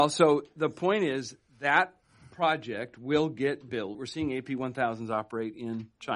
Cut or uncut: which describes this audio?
cut